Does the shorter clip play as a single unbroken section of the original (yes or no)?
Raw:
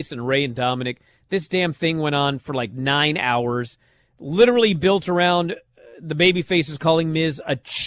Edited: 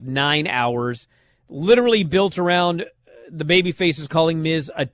yes